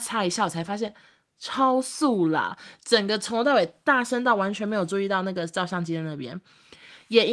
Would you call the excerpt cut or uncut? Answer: cut